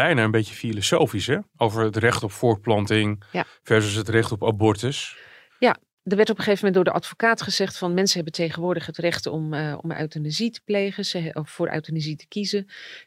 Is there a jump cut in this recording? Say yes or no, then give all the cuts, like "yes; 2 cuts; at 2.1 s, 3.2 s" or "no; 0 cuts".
no; 0 cuts